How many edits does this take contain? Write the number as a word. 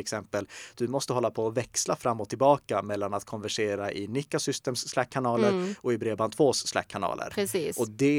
zero